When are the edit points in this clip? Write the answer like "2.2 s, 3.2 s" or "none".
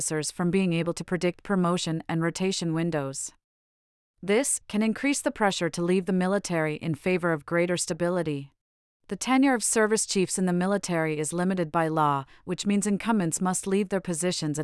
4.6 s, 8.9 s